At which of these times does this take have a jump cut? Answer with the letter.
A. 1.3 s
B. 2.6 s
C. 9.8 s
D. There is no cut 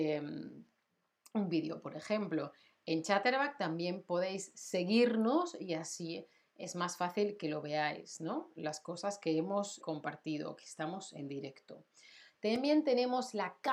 C